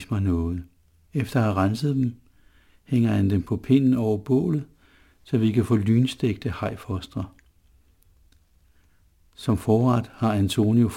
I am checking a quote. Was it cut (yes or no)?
yes